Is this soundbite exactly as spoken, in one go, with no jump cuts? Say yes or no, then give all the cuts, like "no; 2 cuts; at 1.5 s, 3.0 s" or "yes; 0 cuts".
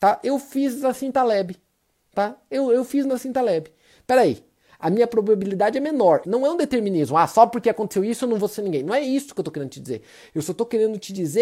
no; 1 cut; at 6.2 s